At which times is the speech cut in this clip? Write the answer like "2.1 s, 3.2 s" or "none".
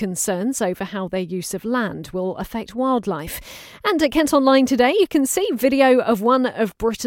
none

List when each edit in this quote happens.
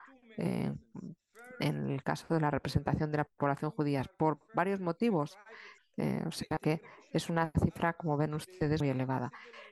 5.8 s, 8.8 s

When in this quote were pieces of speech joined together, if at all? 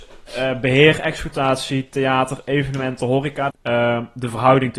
3.5 s

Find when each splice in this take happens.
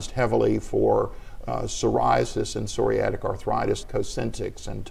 3.8 s

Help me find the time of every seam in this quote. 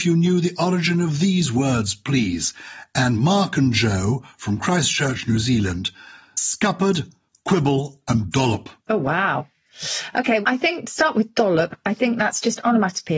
8.8 s, 10.4 s

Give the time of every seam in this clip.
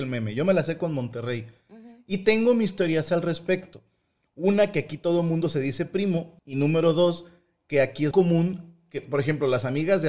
6.4 s, 8.1 s

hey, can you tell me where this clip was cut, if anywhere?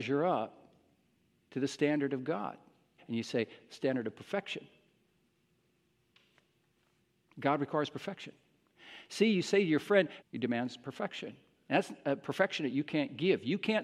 3.0 s, 10.2 s

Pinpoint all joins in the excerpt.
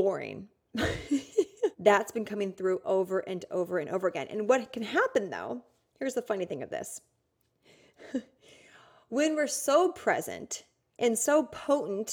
1.7 s

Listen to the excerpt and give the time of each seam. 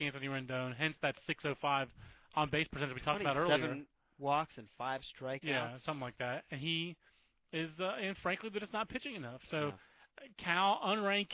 none

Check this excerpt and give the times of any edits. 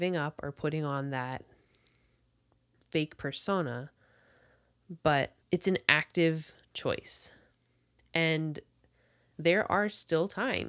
5.4 s, 8.0 s

